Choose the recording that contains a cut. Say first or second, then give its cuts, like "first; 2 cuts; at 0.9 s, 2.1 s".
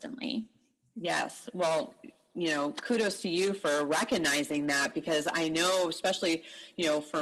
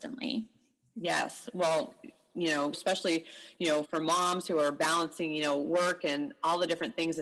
second; 2 cuts; at 2.7 s, 3.8 s